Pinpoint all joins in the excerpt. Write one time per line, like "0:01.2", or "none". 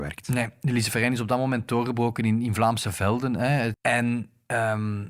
0:03.7